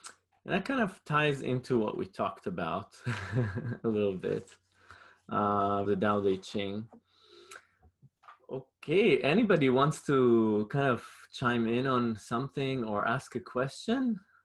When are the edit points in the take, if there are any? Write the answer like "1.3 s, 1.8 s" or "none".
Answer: 5.9 s